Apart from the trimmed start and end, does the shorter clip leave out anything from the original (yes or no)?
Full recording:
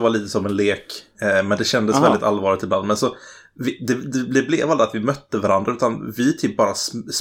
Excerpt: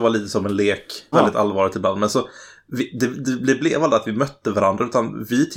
yes